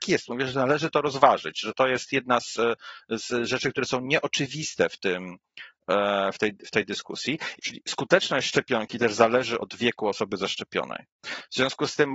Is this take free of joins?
no; 2 cuts; at 7.6 s, 9.6 s

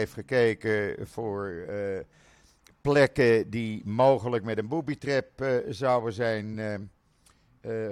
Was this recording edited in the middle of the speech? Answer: no; 0 cuts

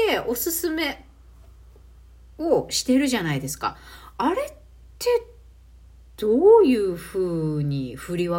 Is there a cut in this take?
no; 0 cuts

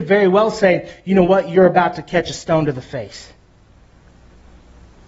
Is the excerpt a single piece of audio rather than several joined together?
yes; 0 cuts

